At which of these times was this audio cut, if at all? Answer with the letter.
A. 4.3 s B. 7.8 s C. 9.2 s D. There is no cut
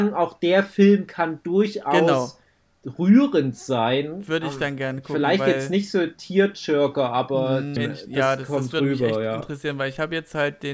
B